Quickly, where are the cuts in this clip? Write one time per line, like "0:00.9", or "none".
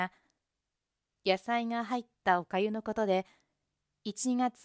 0:01.1